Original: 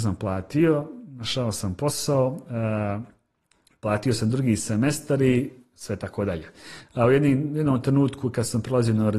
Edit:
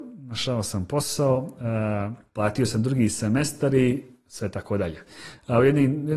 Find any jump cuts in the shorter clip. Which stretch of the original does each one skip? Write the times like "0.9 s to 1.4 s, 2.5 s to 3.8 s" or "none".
3.2 s to 3.7 s